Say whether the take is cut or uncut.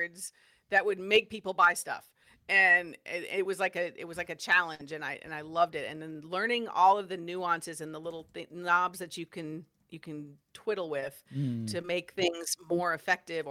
uncut